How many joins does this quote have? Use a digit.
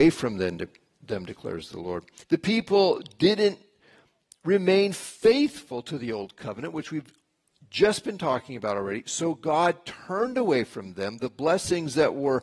1